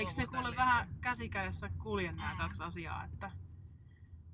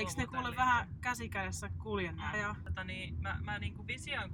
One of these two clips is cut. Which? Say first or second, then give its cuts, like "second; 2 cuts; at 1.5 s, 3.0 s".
second; 1 cut; at 2.3 s